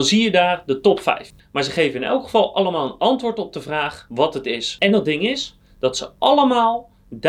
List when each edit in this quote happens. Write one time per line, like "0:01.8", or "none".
0:01.4
0:04.8